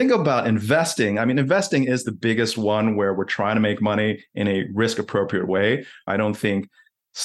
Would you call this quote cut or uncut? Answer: cut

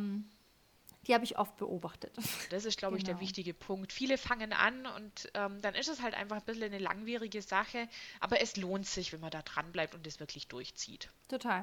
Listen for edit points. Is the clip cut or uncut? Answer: cut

